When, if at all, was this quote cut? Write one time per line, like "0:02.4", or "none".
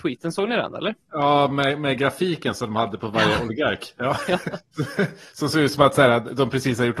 none